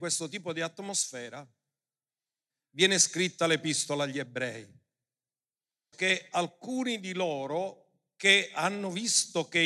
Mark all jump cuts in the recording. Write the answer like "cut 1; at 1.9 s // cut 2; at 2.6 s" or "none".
cut 1; at 2.5 s // cut 2; at 5.9 s